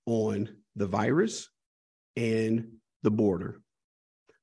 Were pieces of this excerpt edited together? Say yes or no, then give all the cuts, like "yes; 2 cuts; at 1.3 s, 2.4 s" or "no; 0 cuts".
no; 0 cuts